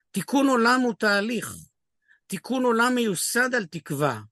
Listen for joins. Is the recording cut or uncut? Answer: uncut